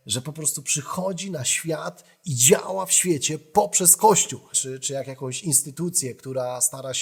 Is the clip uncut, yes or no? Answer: no